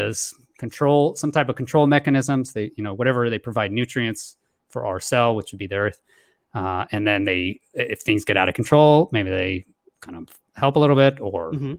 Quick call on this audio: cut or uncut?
uncut